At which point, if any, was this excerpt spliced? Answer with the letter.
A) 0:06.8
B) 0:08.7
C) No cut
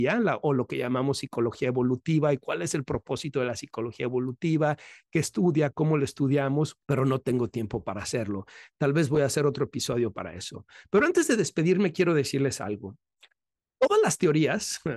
A